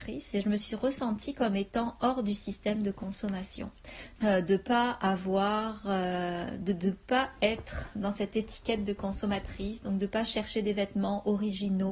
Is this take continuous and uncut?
no; 1 cut; at 4.2 s

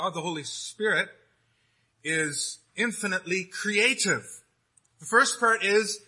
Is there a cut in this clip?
yes; 1 cut; at 4.9 s

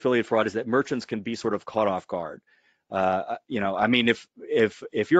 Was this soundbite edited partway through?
no; 0 cuts

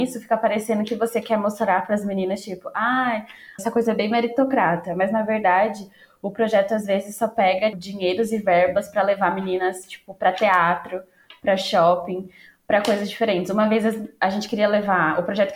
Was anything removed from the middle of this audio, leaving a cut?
yes; 2 cuts; at 3.6 s, 7.7 s

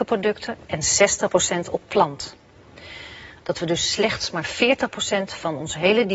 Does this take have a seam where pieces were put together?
yes; 1 cut; at 3.4 s

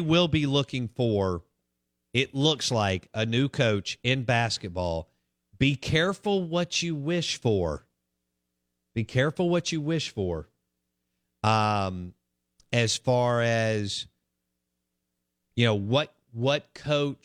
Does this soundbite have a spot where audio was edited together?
no; 0 cuts

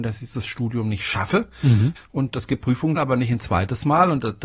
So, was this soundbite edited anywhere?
yes; 2 cuts; at 1.9 s, 3.0 s

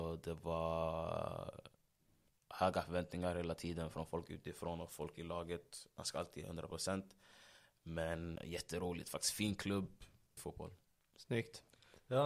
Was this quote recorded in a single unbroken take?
no; 2 cuts; at 8.4 s, 10.4 s

